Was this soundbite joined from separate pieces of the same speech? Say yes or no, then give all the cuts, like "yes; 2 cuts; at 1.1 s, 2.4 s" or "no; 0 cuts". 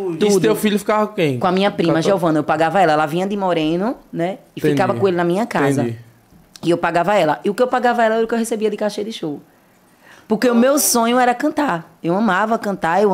no; 0 cuts